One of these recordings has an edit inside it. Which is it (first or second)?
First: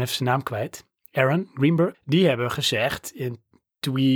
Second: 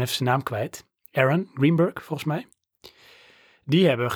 first